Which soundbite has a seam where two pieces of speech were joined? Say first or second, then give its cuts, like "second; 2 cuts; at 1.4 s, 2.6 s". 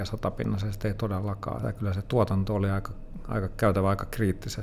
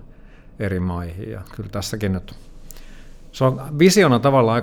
first; 1 cut; at 1.6 s